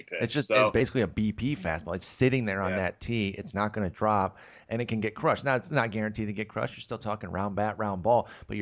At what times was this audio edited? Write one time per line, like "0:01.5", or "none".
0:02.0